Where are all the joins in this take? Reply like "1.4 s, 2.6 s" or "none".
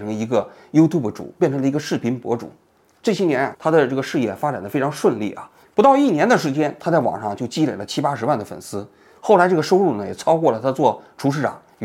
5.6 s